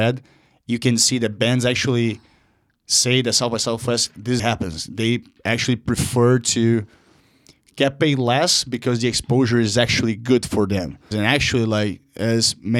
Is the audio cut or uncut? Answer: cut